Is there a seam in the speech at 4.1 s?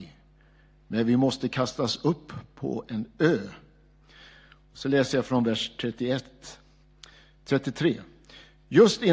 no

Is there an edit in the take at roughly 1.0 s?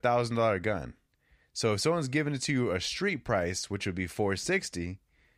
no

